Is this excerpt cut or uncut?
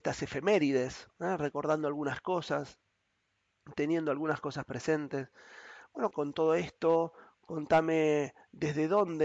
cut